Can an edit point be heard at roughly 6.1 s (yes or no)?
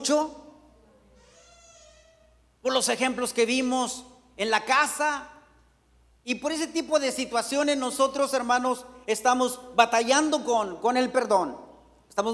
no